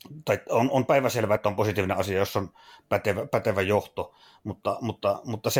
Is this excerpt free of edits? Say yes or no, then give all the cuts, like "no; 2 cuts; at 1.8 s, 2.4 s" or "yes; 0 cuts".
yes; 0 cuts